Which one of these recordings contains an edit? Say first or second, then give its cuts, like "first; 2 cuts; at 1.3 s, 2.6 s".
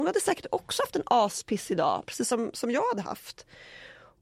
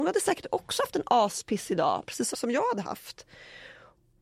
second; 1 cut; at 2.3 s